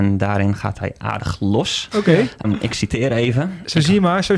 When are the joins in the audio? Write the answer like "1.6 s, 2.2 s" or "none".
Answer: 2.4 s